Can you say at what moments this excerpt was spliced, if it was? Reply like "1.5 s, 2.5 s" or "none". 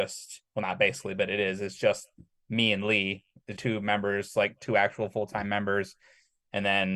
3.6 s